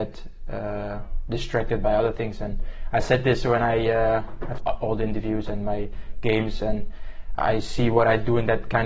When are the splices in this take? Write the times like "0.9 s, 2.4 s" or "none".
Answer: 4.6 s, 7.4 s

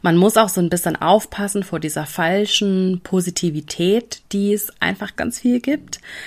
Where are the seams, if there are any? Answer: 5.2 s

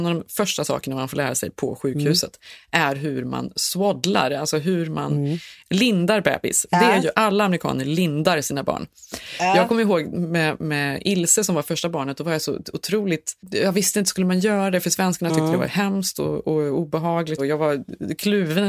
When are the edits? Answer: 13.4 s, 17.4 s

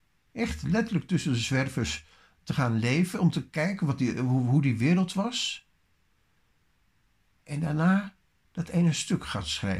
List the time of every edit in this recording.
none

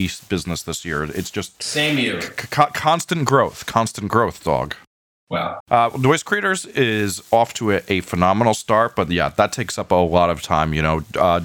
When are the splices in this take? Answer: 5.6 s

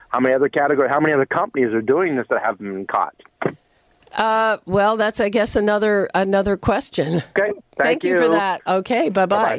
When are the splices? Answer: 7.4 s, 8.6 s

